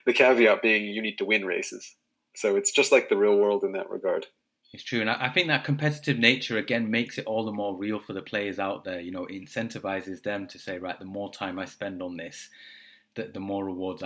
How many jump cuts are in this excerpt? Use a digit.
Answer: 0